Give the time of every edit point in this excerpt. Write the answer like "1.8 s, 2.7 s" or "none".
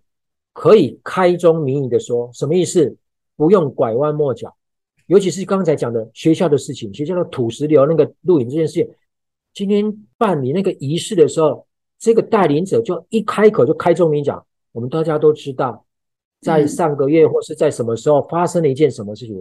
none